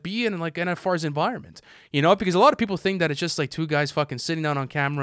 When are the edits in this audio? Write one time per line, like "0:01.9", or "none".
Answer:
none